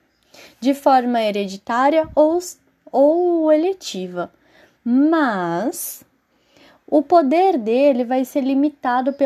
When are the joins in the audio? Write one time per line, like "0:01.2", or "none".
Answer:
none